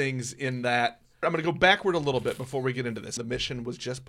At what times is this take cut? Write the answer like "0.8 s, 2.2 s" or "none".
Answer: 1.2 s, 3.2 s